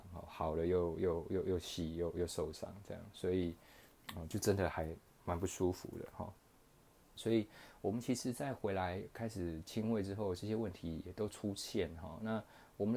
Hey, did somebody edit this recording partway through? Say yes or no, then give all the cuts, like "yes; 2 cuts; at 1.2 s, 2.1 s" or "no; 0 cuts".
yes; 1 cut; at 7.2 s